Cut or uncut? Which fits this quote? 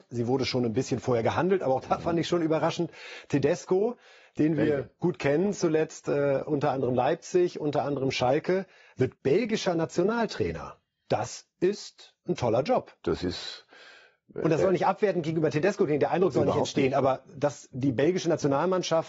cut